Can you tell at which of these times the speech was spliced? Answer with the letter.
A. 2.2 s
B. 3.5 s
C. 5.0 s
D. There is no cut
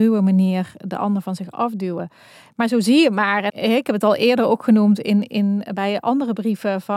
B